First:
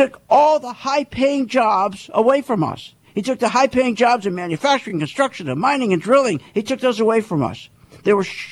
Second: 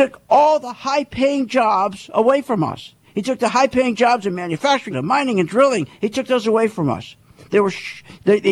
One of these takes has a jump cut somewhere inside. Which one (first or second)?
second